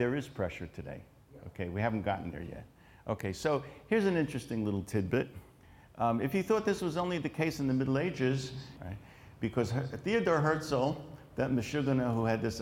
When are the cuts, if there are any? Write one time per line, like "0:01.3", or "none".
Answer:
0:08.8